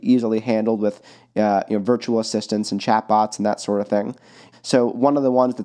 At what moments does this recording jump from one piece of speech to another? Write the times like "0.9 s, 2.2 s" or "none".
4.5 s